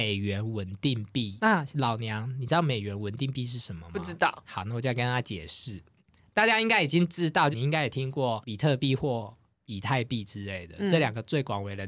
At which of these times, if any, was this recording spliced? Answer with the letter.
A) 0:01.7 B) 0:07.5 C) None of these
B